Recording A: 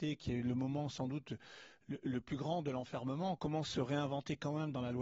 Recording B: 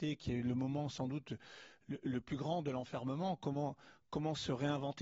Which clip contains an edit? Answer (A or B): A